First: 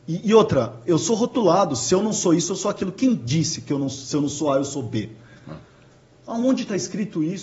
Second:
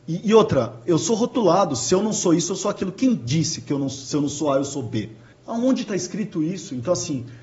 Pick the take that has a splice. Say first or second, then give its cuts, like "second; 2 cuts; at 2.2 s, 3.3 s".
second; 1 cut; at 5.3 s